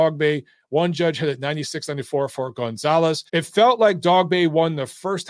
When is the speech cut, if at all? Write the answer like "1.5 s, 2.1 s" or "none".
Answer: 3.3 s